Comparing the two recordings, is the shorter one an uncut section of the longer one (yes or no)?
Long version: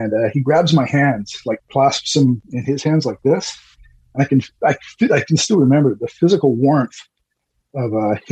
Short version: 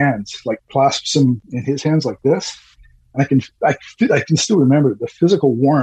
yes